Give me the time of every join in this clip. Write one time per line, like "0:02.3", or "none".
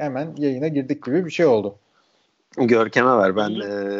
0:02.5